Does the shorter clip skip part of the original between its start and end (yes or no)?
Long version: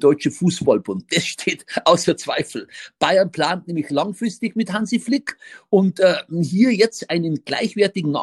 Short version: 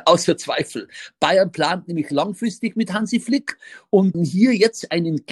yes